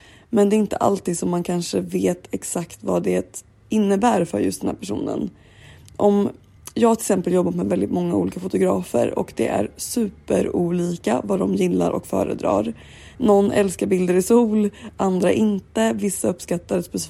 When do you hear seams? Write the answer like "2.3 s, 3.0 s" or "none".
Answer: 13.1 s